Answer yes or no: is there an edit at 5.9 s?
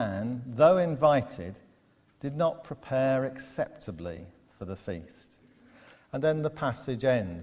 yes